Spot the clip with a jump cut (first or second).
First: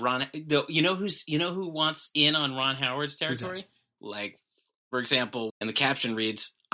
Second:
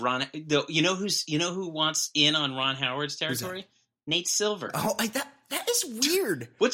first